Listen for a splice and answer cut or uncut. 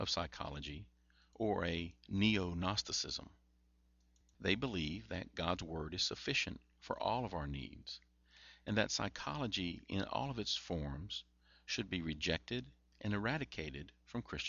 cut